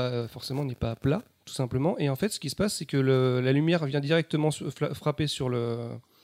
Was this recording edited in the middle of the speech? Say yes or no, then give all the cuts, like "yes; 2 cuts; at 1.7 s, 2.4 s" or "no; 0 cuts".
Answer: no; 0 cuts